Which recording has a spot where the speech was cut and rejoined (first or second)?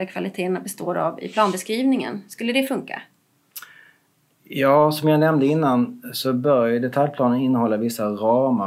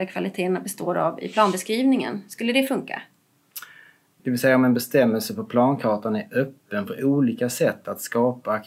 second